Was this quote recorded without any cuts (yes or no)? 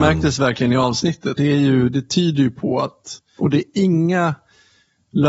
no